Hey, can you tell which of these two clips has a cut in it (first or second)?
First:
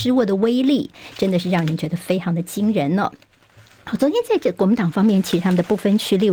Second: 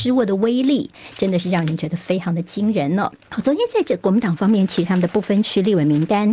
second